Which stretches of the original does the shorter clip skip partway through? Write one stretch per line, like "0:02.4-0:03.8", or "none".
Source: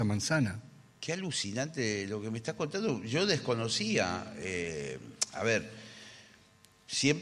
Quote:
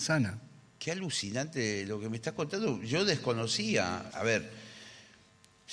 0:04.3-0:05.3